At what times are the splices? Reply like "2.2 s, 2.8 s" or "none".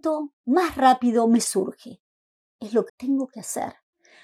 2.9 s